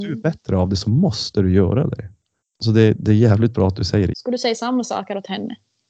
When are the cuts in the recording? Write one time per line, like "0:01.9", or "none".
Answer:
0:02.4
0:04.1